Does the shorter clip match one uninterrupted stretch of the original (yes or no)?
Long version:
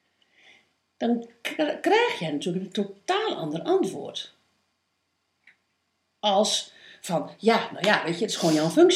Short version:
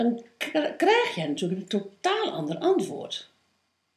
yes